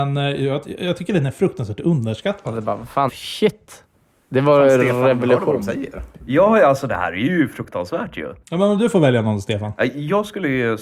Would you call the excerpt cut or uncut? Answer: cut